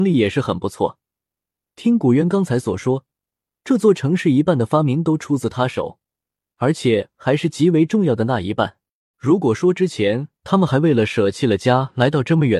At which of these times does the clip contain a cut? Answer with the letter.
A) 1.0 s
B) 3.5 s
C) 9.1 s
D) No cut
C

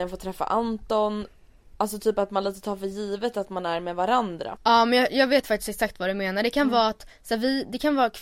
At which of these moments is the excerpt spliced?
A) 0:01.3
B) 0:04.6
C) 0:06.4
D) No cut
B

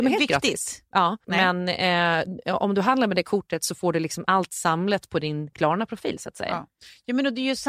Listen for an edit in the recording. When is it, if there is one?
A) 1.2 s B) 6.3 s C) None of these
A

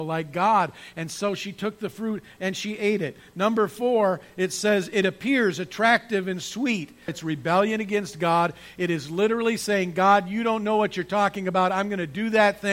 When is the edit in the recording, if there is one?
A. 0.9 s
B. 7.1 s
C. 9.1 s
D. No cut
B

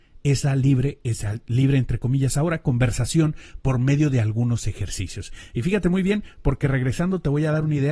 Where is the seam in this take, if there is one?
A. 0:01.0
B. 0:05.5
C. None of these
C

